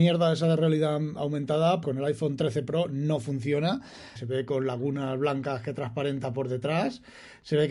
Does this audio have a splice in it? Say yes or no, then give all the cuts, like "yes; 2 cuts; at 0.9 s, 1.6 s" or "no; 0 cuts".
yes; 2 cuts; at 1.8 s, 4.2 s